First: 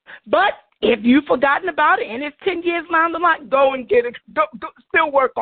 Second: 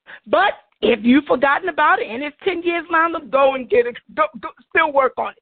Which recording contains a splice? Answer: second; 1 cut; at 3.2 s

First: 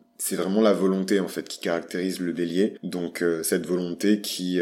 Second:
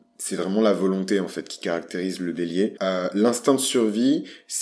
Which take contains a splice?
second; 1 cut; at 2.8 s

